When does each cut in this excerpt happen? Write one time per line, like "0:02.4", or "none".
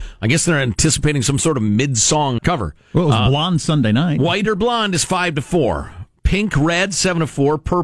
0:02.4

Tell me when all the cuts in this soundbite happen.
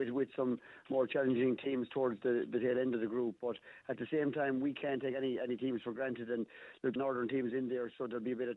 0:07.0

